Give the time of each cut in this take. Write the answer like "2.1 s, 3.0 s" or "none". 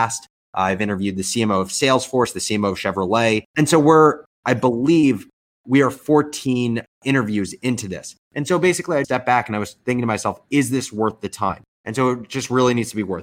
3.5 s, 9.0 s, 11.7 s